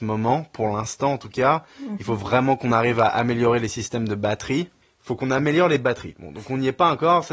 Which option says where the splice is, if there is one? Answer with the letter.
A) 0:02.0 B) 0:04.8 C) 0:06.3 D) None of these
B